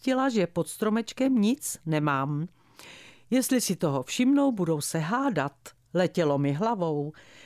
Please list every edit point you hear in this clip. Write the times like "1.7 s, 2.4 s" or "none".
none